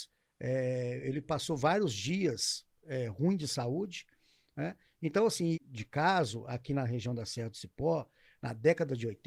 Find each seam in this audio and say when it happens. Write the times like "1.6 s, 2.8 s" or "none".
5.5 s